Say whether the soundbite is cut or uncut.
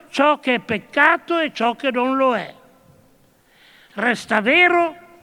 uncut